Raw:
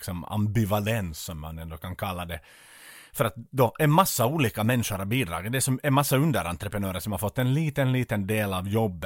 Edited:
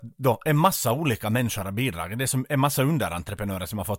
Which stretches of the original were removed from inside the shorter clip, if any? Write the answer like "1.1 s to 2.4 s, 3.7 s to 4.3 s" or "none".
none

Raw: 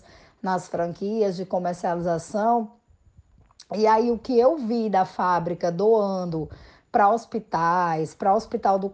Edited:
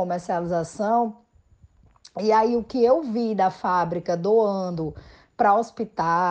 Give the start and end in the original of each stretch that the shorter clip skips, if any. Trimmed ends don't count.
none

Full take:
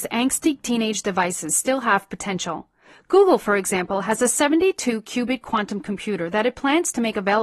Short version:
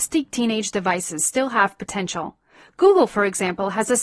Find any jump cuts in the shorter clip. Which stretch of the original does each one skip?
none

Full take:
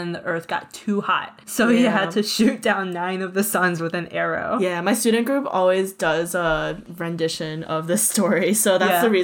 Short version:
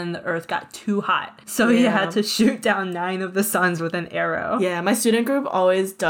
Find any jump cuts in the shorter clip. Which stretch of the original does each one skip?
none

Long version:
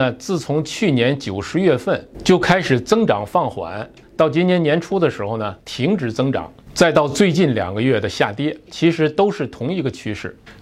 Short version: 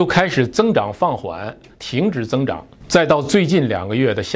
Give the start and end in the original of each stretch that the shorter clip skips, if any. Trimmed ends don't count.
4.1 s to 5.6 s

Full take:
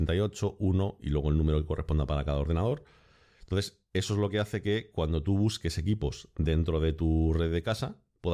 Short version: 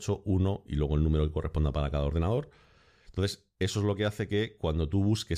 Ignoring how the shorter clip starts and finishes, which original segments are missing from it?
none

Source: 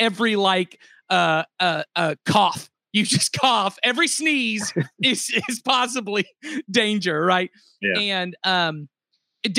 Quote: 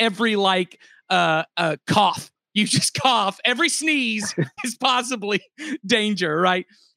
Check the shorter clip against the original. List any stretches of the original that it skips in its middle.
1.5 s to 1.9 s, 5.0 s to 5.4 s

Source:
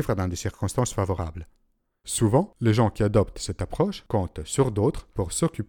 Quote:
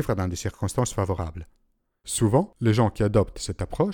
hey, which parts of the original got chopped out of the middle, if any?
none

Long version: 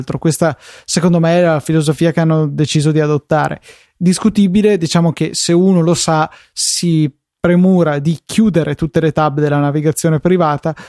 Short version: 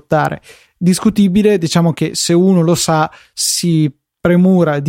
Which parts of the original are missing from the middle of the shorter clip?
none

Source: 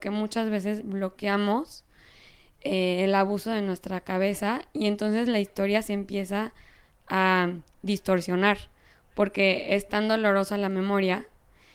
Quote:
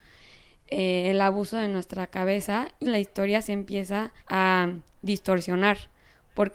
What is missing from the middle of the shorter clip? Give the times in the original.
4.8 s to 5.2 s, 6.6 s to 7.0 s

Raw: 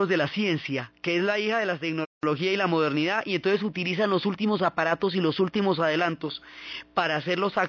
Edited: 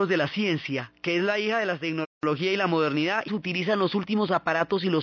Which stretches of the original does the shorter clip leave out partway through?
3.3 s to 3.6 s

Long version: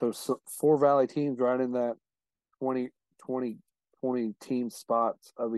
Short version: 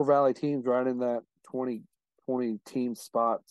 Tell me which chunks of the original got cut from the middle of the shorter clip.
2.1 s to 3.1 s

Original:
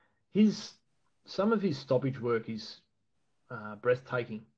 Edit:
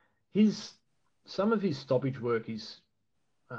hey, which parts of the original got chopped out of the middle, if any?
none

